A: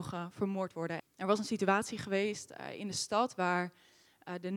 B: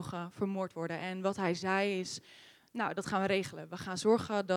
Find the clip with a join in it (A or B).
A